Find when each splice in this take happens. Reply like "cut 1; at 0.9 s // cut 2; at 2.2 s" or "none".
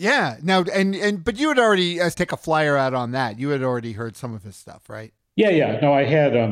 cut 1; at 2.1 s